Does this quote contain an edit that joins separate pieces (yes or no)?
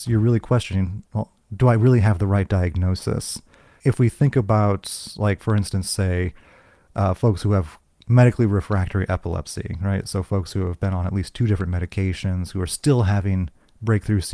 no